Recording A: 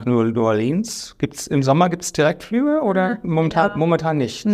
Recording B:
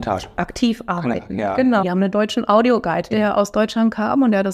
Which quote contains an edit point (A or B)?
B